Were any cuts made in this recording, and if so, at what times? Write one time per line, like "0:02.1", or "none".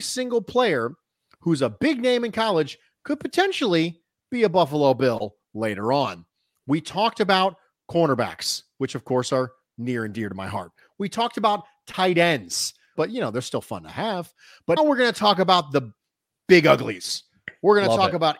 0:13.0
0:14.8